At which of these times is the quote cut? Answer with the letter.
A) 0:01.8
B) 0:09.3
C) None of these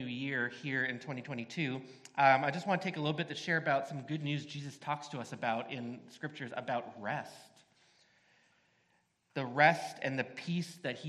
C